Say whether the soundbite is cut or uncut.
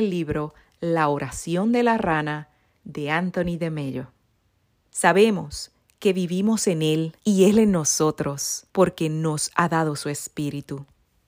cut